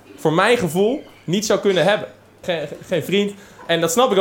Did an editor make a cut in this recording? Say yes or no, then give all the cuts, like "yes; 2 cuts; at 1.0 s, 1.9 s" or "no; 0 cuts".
yes; 1 cut; at 2.4 s